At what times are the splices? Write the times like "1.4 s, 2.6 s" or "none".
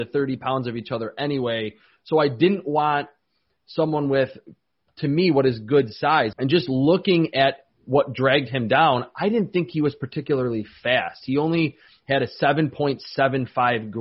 6.3 s